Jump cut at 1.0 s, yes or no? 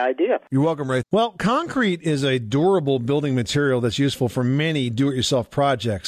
yes